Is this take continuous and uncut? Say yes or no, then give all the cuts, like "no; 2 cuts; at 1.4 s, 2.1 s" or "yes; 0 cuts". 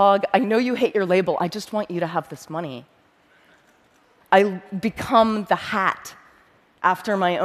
no; 1 cut; at 4.2 s